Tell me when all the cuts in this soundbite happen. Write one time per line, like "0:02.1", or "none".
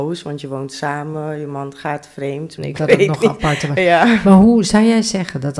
0:02.6